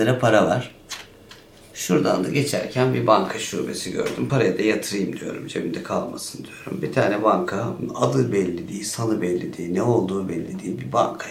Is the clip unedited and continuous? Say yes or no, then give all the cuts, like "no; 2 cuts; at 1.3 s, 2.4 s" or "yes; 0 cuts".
yes; 0 cuts